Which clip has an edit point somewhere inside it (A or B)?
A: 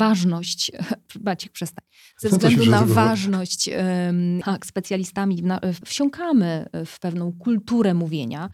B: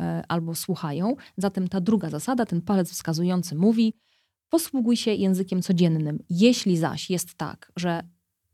A